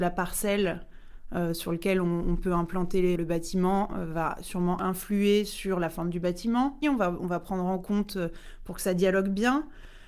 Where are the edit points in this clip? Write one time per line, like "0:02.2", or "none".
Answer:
0:03.2
0:06.8